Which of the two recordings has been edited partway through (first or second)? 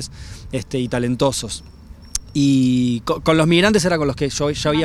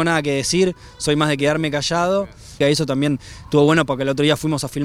second